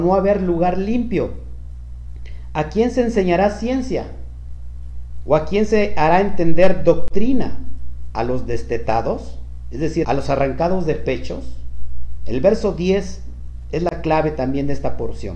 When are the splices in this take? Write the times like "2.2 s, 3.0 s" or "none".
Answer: 10.0 s, 12.2 s